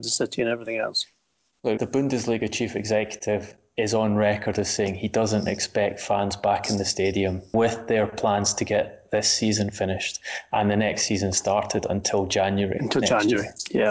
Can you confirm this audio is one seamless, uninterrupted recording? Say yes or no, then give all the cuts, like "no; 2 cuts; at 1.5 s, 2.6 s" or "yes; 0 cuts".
no; 2 cuts; at 1.8 s, 7.5 s